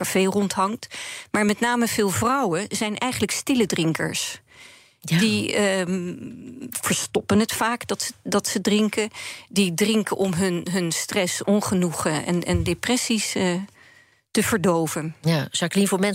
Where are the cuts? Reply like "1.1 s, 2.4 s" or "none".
none